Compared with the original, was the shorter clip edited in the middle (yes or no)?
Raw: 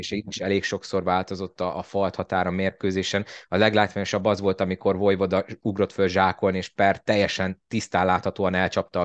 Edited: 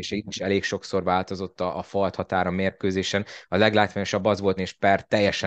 yes